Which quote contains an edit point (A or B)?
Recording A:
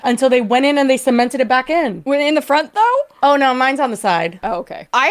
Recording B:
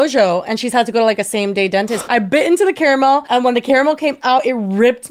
B